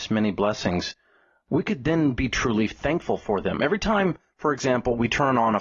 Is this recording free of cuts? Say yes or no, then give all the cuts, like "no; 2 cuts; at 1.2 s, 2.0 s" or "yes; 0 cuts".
yes; 0 cuts